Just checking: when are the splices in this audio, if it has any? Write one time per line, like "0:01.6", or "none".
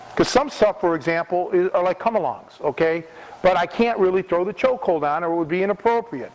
0:03.4